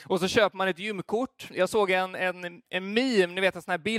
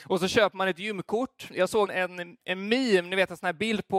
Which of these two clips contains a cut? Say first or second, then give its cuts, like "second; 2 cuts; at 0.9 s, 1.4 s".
second; 1 cut; at 1.9 s